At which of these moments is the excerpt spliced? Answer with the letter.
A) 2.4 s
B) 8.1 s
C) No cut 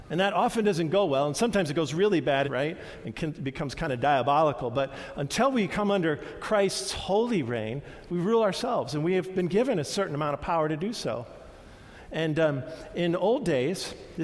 A